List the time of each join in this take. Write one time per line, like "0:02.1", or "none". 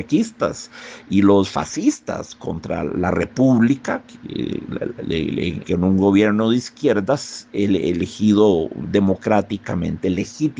0:05.6